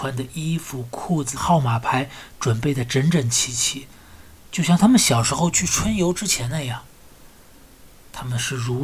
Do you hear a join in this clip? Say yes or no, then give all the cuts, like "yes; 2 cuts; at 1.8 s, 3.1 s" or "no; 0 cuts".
yes; 1 cut; at 1.4 s